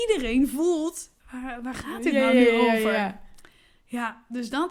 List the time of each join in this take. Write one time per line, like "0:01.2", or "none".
0:01.2